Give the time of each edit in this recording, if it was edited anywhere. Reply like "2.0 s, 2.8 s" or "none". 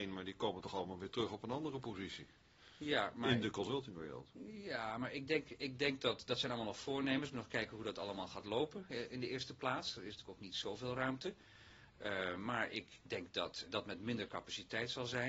13.7 s